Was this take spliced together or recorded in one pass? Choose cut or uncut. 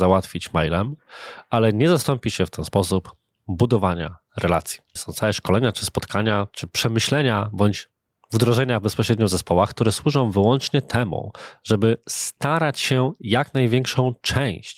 cut